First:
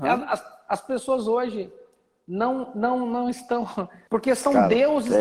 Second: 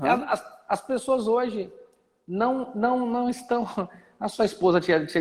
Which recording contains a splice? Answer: first; 1 cut; at 4.1 s

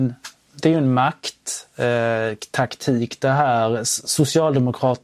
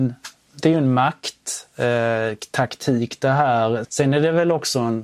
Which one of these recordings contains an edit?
second; 1 cut; at 3.8 s

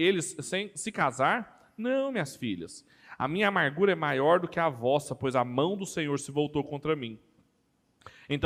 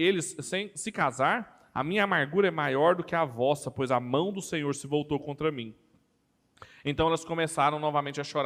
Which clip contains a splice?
second; 1 cut; at 1.7 s

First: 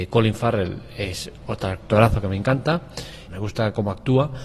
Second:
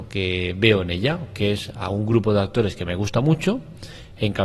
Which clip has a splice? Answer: first; 1 cut; at 3.3 s

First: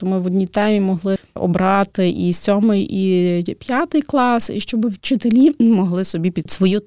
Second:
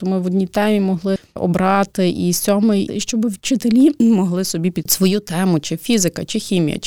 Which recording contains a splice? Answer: second; 1 cut; at 2.9 s

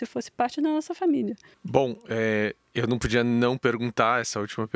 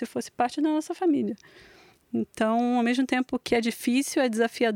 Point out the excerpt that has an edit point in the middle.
first; 1 cut; at 1.5 s

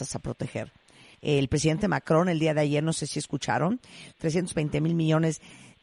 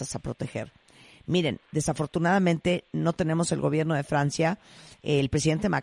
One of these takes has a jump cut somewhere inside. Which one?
first; 2 cuts; at 1.1 s, 4.1 s

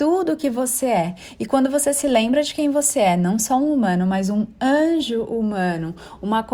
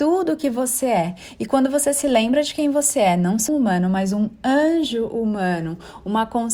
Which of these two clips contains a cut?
second; 1 cut; at 3.5 s

